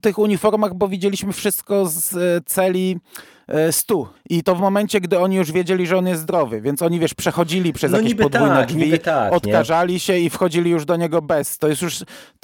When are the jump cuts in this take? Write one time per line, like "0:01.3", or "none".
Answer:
0:04.1

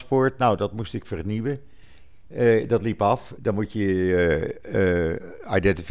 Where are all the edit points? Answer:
0:03.4

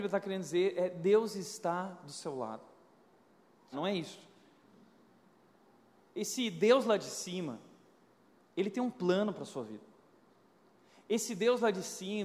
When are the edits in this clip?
0:03.7

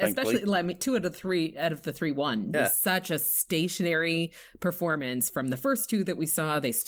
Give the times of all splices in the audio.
0:02.5

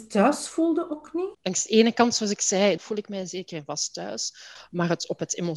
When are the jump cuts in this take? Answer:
0:01.3
0:02.8

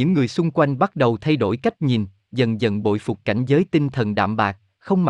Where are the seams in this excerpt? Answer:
none

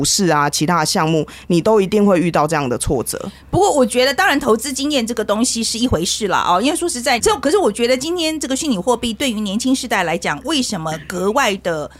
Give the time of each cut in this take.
0:07.2

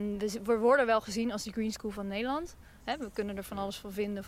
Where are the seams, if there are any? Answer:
0:02.8

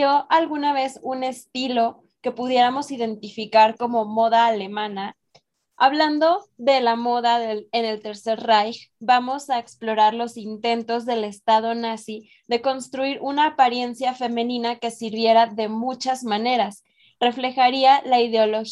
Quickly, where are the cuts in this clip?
0:05.7

